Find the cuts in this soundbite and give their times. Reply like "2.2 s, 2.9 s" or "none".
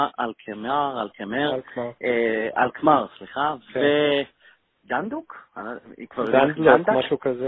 none